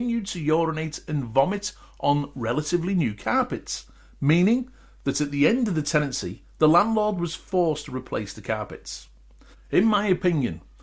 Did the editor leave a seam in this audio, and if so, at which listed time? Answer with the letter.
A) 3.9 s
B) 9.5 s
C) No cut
B